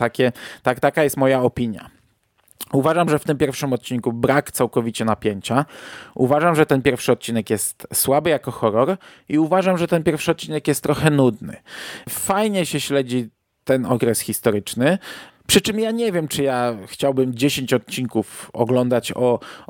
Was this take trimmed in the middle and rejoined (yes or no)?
no